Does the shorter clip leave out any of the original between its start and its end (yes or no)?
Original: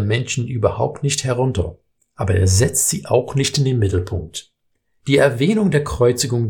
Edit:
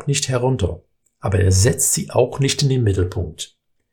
no